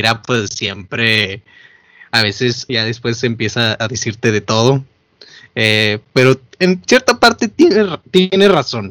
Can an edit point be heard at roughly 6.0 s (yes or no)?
no